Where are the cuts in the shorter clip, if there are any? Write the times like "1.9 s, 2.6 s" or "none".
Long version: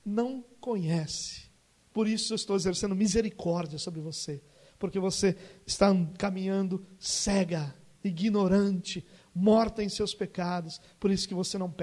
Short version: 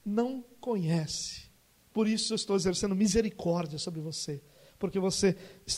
none